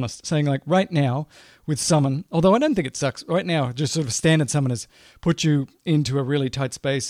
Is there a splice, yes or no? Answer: no